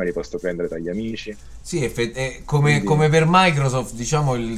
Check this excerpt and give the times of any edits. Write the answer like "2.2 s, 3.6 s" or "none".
none